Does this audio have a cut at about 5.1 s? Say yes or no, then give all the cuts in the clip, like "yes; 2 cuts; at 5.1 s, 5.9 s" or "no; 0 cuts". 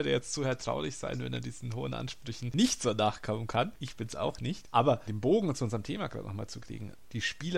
yes; 1 cut; at 5.1 s